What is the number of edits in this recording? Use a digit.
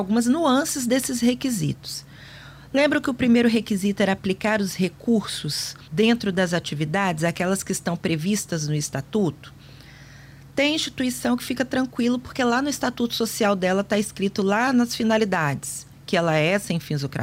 1